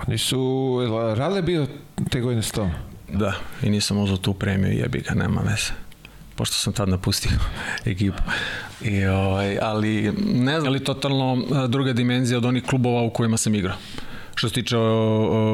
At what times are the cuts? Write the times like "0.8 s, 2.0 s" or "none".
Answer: 3.1 s, 10.6 s